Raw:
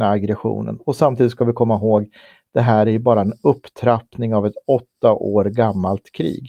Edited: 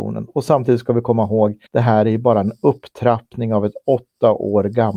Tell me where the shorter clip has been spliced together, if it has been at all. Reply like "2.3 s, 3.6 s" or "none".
1.7 s